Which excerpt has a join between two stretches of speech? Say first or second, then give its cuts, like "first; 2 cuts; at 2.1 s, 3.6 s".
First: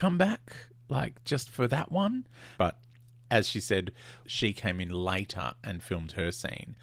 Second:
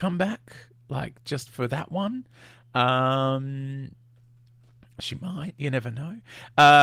first; 2 cuts; at 2.5 s, 4.2 s